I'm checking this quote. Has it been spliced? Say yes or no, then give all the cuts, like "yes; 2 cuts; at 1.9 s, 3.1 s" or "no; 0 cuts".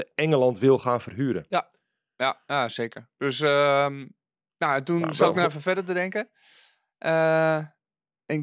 no; 0 cuts